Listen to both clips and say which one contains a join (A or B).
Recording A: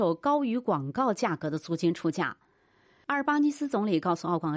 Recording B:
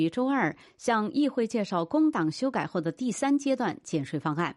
A